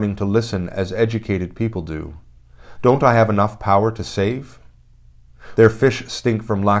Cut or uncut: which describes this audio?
cut